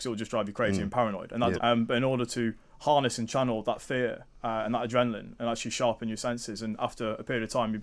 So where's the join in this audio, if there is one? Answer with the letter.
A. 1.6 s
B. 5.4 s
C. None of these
A